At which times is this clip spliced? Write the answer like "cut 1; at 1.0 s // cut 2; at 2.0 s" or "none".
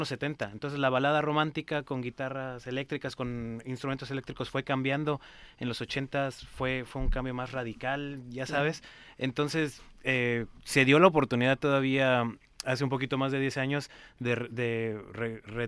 none